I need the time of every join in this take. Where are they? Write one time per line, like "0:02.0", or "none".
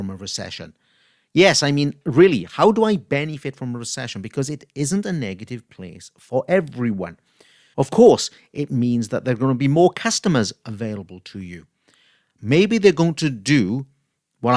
0:07.7
0:12.4